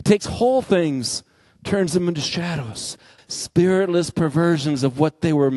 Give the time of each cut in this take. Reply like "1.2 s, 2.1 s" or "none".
3.2 s